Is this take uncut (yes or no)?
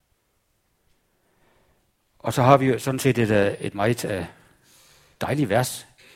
yes